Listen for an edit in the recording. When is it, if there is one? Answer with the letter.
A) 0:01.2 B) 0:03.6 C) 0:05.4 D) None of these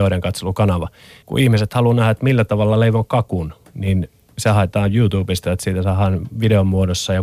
A